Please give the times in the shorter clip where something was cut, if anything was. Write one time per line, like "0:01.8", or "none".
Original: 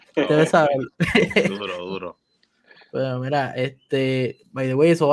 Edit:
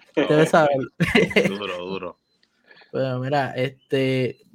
none